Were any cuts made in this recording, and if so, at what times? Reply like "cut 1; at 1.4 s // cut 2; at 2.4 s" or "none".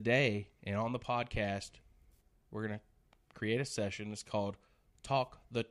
none